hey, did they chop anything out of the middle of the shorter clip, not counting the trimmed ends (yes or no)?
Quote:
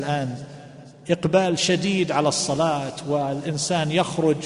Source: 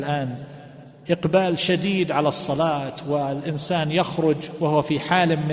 no